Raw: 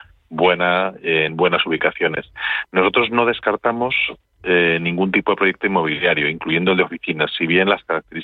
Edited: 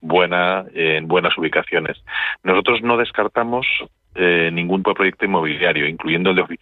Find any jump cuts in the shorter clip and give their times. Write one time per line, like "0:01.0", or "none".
0:04.8